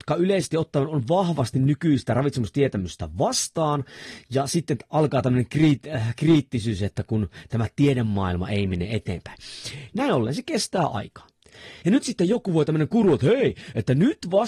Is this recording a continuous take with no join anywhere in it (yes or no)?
no